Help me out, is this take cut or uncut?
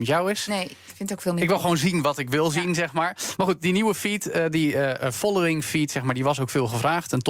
uncut